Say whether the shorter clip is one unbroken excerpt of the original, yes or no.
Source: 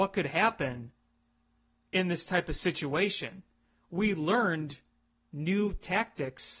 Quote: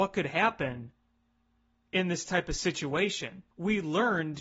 no